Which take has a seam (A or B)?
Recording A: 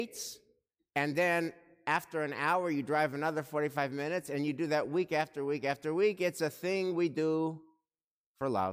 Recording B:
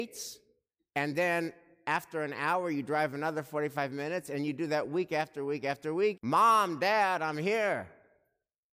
B